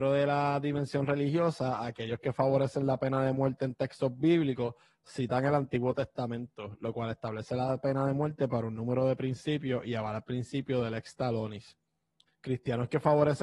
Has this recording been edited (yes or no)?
yes